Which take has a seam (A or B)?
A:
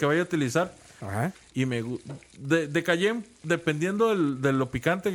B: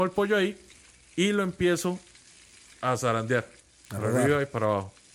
A